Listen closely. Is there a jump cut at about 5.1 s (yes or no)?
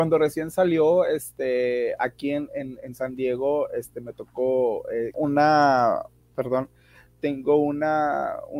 yes